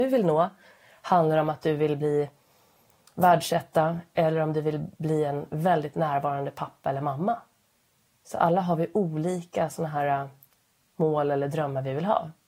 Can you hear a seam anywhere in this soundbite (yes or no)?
no